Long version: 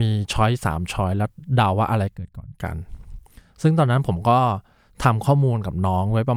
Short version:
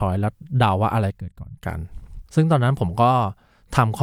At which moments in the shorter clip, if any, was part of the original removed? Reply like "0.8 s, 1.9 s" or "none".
2.3 s